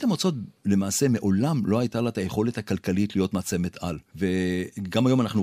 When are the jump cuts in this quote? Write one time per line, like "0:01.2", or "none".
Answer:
none